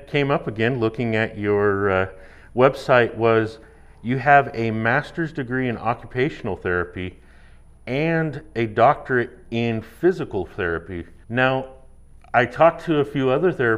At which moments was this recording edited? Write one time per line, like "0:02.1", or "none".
0:11.2